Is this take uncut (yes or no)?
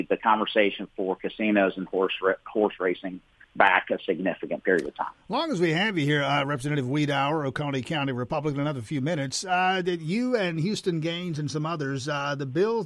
yes